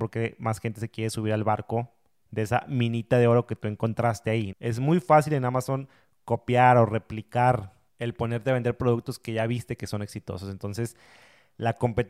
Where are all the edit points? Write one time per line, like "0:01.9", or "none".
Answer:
0:04.5